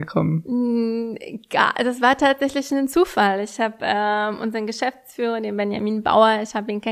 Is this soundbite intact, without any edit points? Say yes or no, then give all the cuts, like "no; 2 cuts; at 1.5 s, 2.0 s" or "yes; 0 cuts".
yes; 0 cuts